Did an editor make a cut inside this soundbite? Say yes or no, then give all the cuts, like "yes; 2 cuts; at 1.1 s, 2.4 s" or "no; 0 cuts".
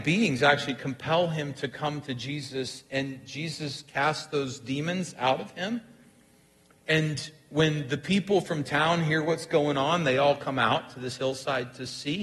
no; 0 cuts